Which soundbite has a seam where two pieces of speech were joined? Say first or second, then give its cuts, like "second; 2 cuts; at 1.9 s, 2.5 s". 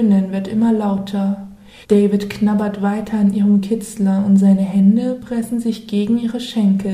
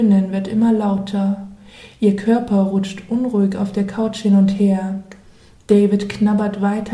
first; 1 cut; at 1.8 s